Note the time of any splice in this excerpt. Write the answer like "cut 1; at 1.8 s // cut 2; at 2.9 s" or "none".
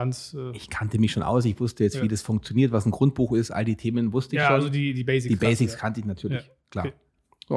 none

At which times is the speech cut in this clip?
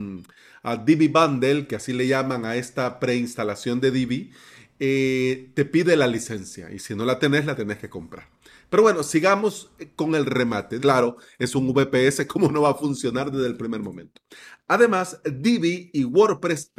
cut 1; at 10.8 s

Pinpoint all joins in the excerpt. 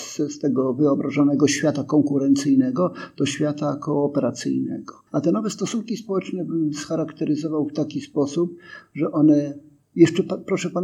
cut 1; at 5.1 s

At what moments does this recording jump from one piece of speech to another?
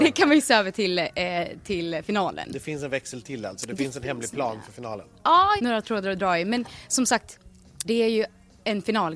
cut 1; at 5.6 s // cut 2; at 7.8 s

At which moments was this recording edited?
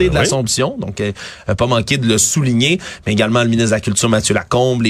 none

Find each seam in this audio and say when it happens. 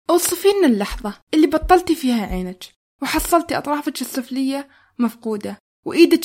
cut 1; at 1.2 s

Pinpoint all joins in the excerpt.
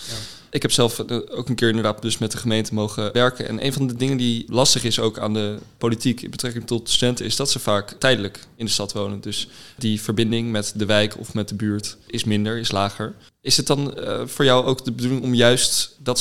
none

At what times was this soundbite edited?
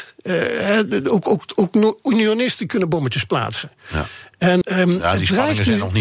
cut 1; at 4.6 s

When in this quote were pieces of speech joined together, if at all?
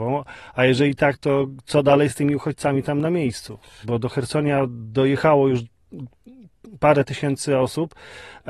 cut 1; at 3.8 s

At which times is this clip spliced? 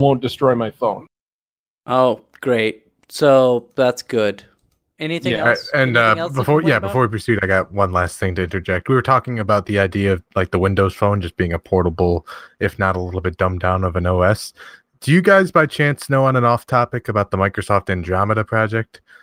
none

